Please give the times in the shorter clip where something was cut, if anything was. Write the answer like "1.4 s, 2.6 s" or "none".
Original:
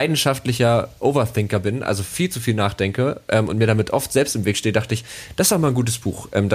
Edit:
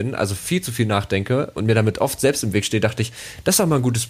1.6 s